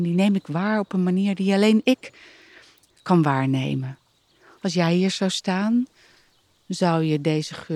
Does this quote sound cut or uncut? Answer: cut